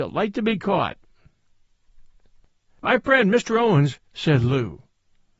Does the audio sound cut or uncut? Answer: cut